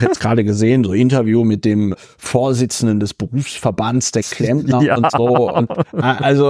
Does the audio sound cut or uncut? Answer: uncut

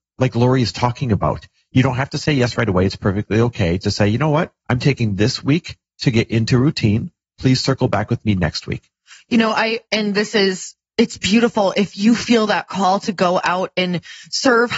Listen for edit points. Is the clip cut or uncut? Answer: cut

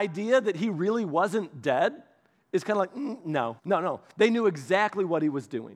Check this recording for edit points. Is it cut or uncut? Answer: cut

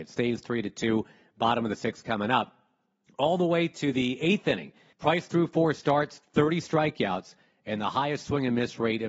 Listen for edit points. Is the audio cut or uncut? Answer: cut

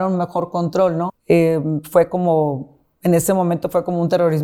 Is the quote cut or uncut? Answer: cut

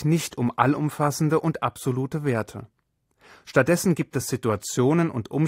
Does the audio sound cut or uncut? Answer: uncut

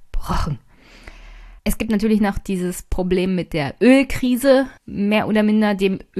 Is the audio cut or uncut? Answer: cut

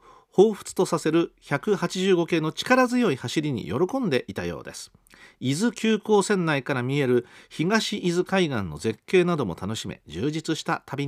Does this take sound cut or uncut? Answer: uncut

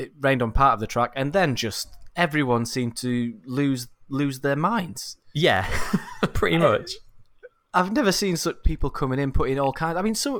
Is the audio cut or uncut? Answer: cut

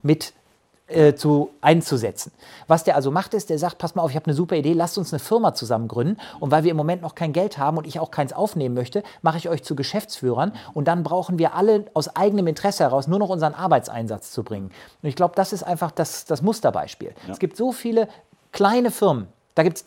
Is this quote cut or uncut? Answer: cut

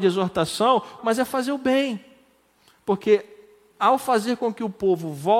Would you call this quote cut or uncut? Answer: cut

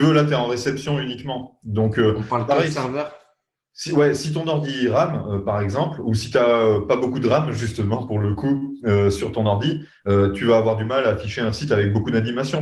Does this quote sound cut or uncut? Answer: uncut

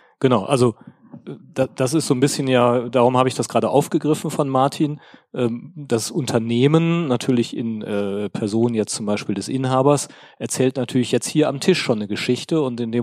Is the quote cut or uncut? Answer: uncut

